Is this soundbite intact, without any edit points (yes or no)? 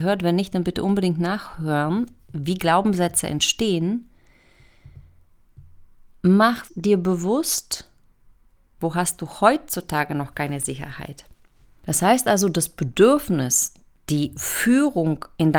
no